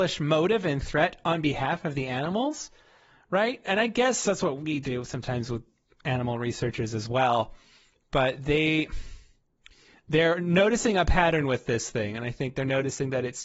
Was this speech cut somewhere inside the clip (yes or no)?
no